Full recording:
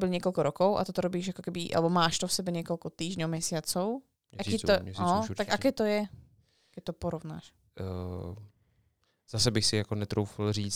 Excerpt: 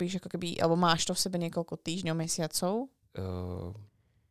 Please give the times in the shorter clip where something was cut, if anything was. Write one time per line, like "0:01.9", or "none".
0:03.0